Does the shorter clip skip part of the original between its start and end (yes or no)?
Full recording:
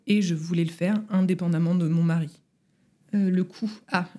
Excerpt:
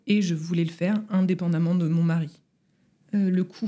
no